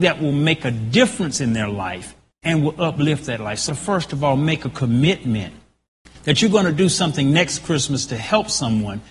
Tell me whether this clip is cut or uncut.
cut